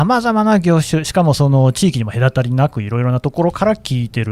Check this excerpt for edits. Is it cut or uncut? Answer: uncut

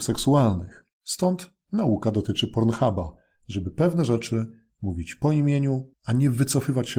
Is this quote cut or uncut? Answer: cut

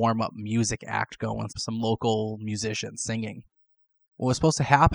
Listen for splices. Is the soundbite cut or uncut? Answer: cut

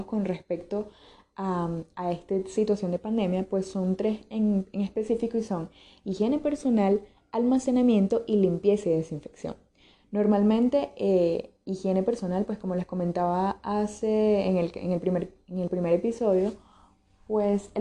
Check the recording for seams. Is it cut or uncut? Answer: uncut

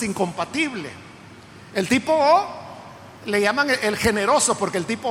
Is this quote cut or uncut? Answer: uncut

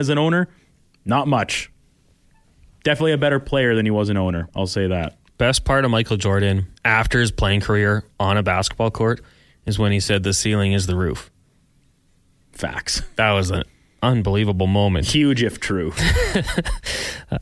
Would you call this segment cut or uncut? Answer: cut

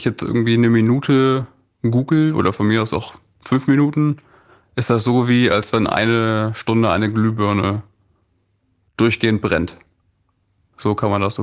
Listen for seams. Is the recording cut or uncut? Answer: uncut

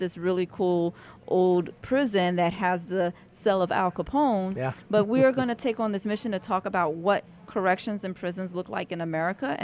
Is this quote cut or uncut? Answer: uncut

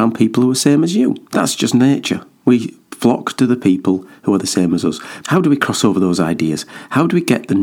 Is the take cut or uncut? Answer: cut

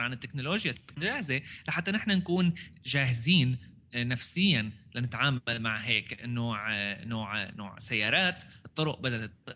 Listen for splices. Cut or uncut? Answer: uncut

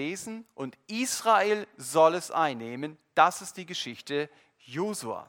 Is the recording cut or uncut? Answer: uncut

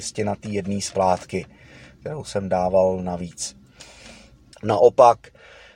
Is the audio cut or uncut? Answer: cut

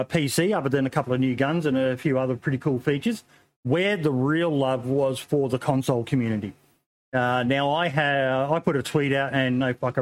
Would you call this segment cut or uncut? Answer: uncut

